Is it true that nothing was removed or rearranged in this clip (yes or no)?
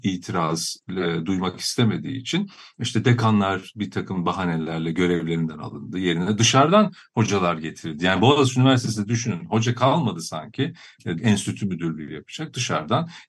no